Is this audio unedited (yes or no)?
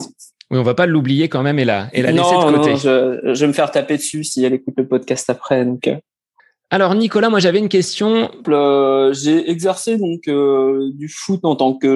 no